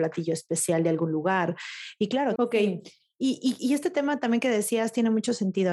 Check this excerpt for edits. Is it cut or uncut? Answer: cut